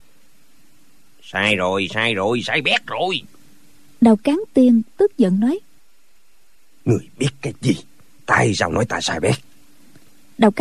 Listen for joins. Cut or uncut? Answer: uncut